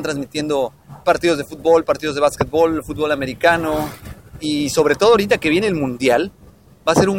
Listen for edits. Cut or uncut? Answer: cut